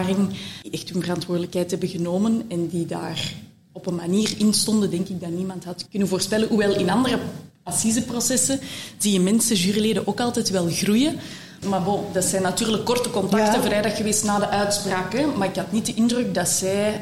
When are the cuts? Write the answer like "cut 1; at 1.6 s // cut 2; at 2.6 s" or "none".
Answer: cut 1; at 5.9 s // cut 2; at 11.6 s